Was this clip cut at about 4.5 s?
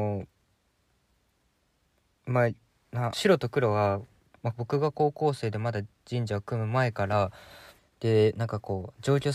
yes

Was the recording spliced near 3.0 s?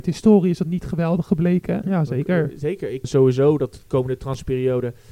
yes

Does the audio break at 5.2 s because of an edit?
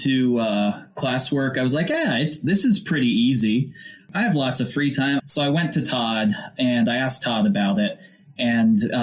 yes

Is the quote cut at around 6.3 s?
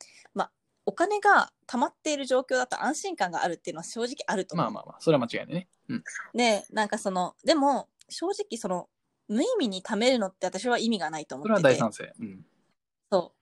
yes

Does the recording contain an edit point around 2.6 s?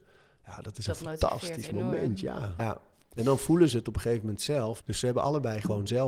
yes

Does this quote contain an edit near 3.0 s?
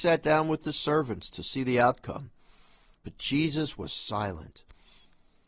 yes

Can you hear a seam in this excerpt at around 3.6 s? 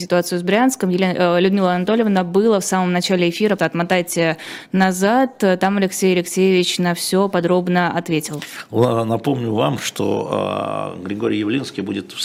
yes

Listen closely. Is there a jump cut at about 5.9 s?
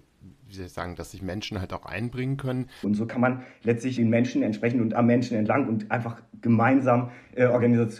no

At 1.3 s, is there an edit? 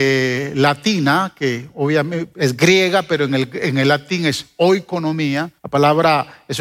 no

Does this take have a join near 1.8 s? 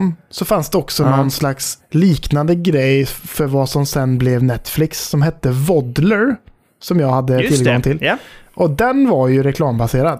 yes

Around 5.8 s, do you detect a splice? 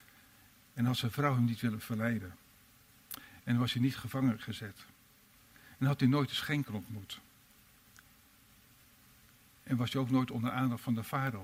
no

